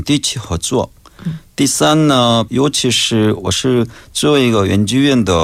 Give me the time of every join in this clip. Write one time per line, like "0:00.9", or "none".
0:02.5